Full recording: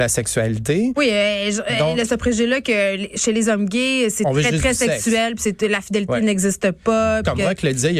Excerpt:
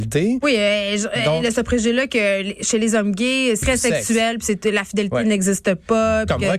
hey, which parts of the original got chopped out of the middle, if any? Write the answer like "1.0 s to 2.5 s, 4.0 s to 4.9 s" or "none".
4.2 s to 4.6 s